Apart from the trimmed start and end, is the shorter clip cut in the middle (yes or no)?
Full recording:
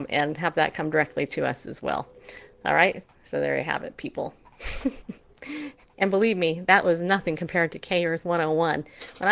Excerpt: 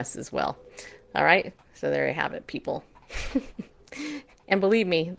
no